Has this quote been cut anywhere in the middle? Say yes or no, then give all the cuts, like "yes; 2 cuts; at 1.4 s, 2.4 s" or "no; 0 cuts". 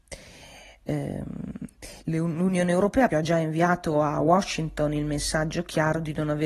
yes; 2 cuts; at 2.0 s, 3.1 s